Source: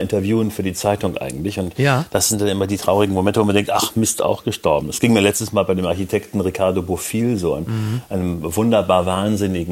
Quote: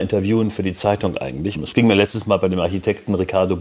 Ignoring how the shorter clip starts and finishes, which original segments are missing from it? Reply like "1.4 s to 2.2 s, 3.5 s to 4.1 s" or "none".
1.5 s to 4.8 s